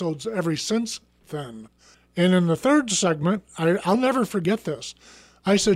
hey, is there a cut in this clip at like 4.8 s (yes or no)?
no